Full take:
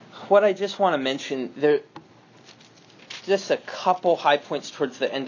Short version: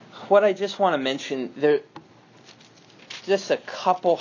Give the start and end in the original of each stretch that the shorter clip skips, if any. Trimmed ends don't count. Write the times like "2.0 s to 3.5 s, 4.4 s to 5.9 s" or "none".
none